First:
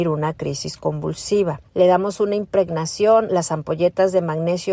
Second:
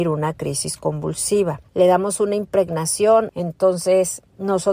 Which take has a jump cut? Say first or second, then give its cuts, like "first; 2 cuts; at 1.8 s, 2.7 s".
second; 1 cut; at 3.3 s